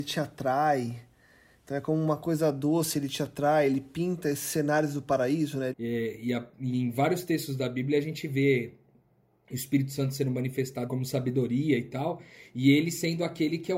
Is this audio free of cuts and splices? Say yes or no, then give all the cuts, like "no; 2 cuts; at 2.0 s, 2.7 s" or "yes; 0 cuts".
no; 2 cuts; at 5.7 s, 10.9 s